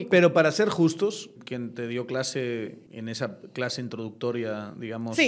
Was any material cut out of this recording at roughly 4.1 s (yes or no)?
no